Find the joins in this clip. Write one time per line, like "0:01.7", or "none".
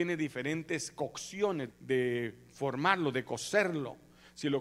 0:01.7